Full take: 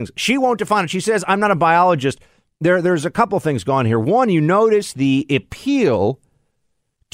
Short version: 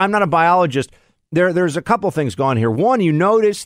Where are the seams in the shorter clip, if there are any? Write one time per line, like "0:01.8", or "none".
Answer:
none